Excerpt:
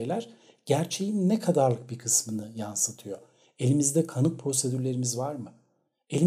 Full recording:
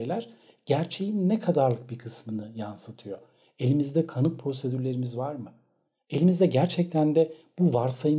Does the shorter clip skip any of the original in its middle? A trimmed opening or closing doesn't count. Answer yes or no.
no